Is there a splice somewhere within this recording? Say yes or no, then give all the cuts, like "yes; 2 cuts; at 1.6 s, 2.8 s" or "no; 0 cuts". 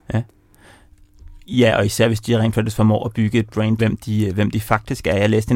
yes; 1 cut; at 3.8 s